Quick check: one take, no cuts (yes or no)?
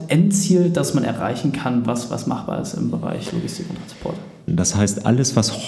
no